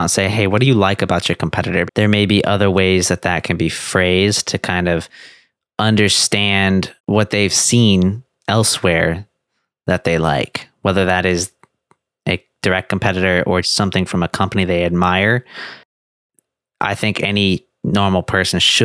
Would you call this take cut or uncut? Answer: cut